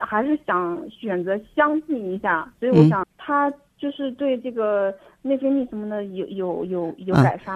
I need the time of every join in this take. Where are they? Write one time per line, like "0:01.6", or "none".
0:03.0